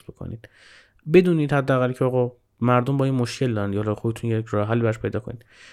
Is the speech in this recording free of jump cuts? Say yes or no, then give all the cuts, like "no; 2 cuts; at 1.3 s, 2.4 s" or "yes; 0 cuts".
yes; 0 cuts